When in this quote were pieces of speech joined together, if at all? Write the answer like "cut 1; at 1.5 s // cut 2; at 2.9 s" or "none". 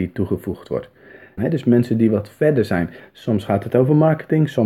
cut 1; at 1.4 s // cut 2; at 3.0 s